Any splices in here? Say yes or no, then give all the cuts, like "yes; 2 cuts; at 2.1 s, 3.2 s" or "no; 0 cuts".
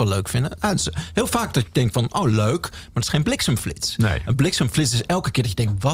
no; 0 cuts